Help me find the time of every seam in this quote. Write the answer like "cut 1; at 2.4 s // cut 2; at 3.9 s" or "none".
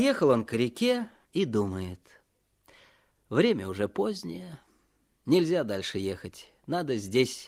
none